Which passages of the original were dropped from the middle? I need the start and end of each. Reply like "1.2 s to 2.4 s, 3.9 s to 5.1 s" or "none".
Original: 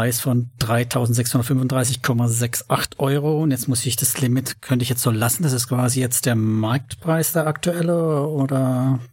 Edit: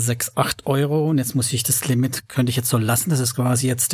none